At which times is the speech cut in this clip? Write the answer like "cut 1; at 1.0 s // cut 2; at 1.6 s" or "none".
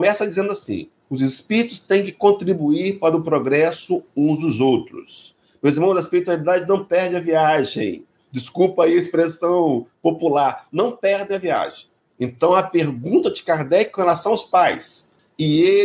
cut 1; at 1.0 s